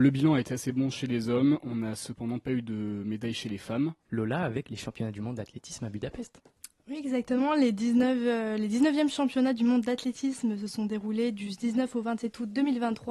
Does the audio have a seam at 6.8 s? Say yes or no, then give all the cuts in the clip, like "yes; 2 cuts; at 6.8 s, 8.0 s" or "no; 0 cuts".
no; 1 cut; at 4.1 s